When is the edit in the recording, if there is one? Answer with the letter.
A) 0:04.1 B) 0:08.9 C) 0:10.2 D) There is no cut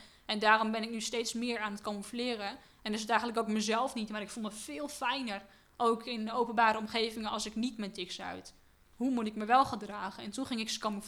B